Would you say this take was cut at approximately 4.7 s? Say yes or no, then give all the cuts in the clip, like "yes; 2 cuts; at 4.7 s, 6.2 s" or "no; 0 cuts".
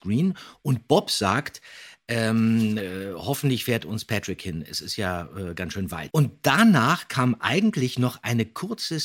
no; 1 cut; at 6.1 s